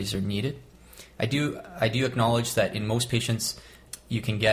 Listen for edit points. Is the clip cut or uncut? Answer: cut